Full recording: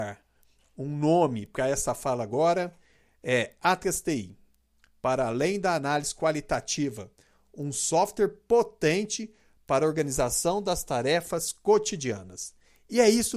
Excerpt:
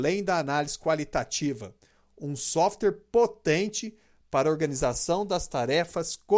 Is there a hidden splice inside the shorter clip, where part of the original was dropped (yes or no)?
no